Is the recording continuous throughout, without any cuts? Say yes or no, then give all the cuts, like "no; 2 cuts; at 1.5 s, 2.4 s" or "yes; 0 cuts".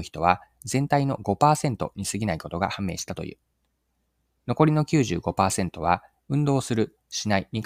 yes; 0 cuts